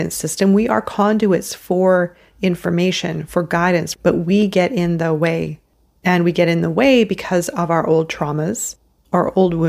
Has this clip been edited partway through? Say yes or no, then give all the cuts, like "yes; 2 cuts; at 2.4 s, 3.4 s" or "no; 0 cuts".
yes; 1 cut; at 3.9 s